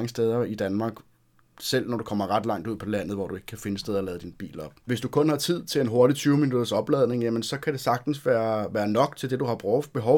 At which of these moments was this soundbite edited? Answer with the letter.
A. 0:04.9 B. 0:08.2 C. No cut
A